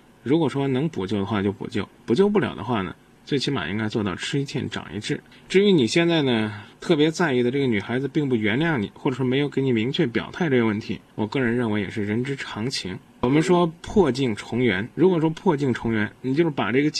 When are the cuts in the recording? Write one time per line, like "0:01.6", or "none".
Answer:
0:11.1
0:14.9

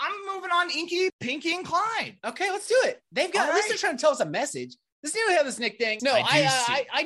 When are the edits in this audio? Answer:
0:01.1
0:06.0

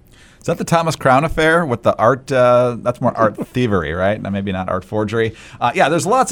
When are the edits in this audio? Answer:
none

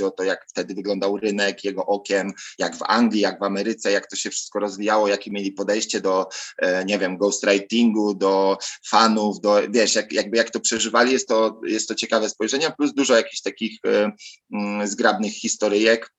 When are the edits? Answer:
none

